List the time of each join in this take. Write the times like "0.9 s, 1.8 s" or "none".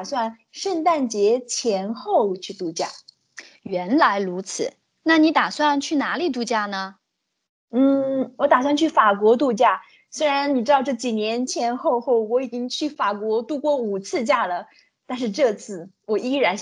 11.5 s